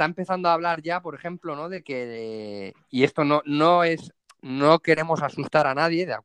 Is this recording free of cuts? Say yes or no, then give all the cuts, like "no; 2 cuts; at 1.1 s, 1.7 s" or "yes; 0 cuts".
yes; 0 cuts